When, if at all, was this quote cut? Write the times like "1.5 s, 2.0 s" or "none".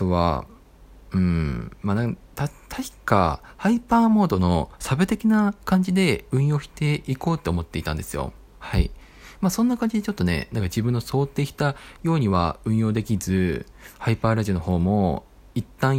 none